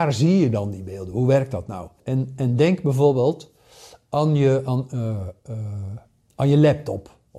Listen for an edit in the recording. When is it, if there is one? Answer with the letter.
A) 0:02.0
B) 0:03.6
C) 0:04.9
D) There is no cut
A